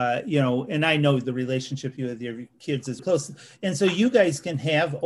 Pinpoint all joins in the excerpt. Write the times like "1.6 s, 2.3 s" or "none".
3.0 s